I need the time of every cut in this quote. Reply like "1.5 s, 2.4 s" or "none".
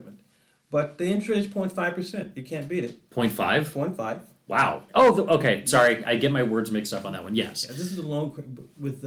4.9 s